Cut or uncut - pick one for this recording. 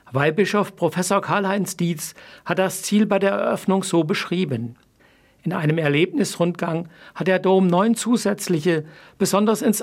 uncut